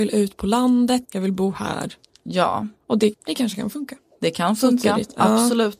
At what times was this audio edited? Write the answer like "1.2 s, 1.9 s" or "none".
1.0 s, 3.1 s